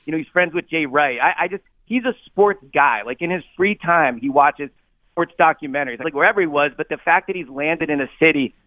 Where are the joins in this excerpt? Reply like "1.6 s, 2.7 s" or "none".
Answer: 6.0 s